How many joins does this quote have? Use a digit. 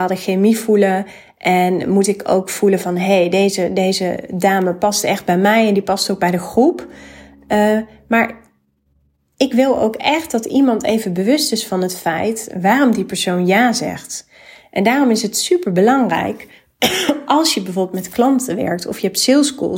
0